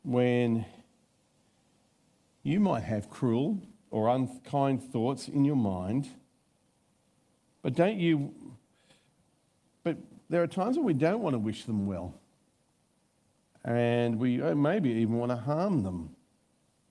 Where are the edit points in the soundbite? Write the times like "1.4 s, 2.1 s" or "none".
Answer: 7.5 s